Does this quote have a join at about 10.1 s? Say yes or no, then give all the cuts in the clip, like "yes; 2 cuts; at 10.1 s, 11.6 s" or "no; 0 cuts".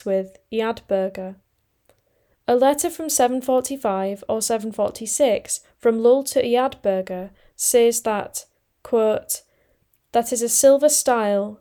yes; 1 cut; at 10.1 s